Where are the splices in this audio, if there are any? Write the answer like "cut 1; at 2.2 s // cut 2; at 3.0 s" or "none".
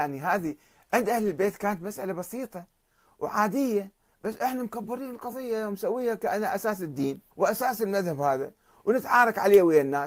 cut 1; at 7.3 s